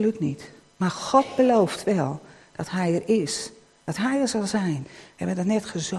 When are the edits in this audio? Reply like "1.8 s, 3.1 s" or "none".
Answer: 4.8 s